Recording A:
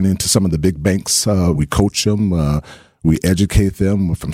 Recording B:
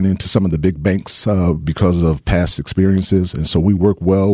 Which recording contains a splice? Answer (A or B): A